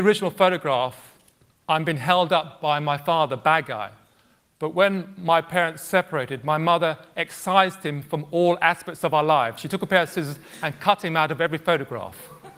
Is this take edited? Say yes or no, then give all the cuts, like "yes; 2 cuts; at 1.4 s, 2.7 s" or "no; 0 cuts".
no; 0 cuts